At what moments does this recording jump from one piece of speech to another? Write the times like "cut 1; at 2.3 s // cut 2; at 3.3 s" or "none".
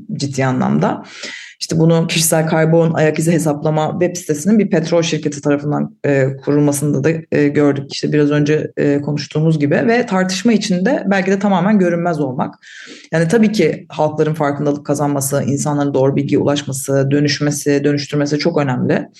cut 1; at 7.9 s